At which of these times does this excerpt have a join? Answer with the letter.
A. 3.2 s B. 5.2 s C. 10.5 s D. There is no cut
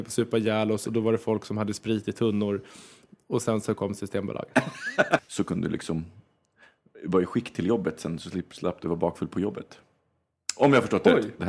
B